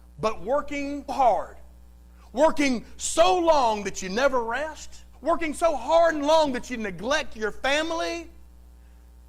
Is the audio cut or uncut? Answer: cut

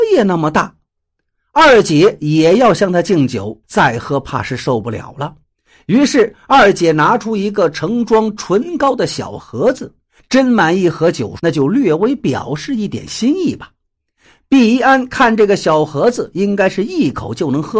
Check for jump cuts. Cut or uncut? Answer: cut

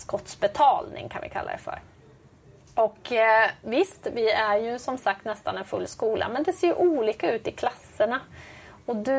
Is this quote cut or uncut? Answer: uncut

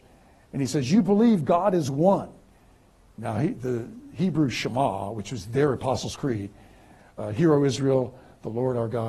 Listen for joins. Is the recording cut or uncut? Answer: uncut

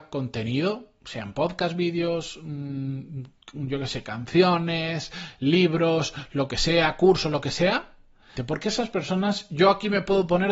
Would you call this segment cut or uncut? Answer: cut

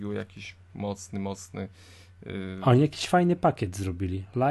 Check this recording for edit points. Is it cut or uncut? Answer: uncut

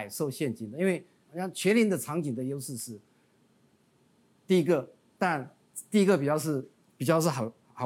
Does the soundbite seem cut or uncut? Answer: cut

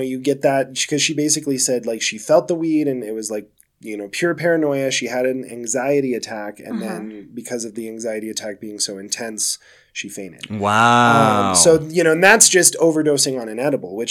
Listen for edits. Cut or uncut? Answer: uncut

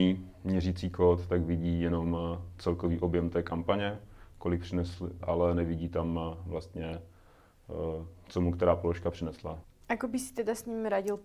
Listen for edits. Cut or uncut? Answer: cut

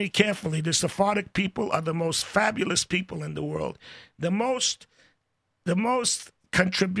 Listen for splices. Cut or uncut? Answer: uncut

